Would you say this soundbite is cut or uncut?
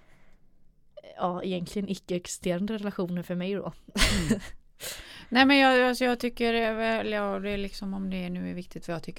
uncut